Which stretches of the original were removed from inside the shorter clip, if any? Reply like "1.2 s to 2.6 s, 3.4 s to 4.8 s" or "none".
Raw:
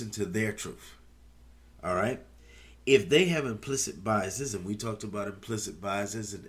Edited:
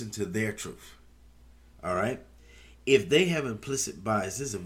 none